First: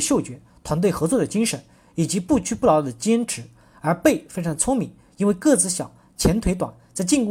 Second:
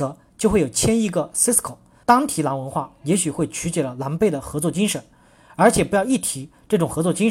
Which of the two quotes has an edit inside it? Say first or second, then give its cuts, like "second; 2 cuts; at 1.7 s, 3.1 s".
second; 1 cut; at 2.0 s